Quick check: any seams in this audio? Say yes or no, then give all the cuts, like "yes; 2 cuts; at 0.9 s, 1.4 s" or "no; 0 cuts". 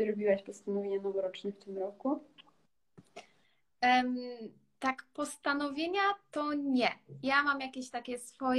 no; 0 cuts